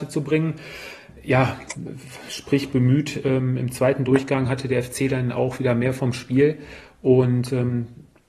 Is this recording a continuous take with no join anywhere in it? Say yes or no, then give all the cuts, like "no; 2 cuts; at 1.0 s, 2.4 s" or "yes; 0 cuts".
yes; 0 cuts